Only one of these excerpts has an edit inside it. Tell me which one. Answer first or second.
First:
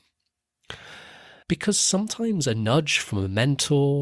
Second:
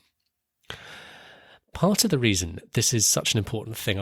first